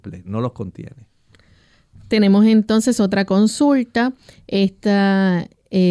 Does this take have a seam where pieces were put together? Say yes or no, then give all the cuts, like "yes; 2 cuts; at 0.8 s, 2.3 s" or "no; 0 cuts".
no; 0 cuts